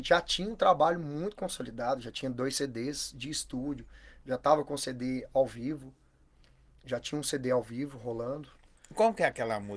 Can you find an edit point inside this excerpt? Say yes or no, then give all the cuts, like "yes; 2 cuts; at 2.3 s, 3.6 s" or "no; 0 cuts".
no; 0 cuts